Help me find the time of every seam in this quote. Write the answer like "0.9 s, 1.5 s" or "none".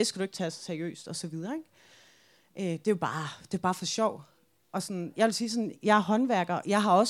none